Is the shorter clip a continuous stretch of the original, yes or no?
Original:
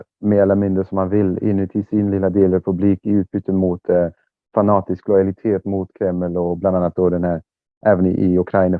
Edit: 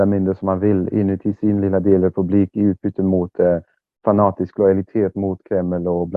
yes